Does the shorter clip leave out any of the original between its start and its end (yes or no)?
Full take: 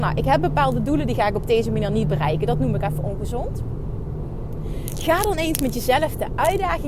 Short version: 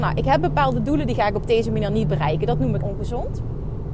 yes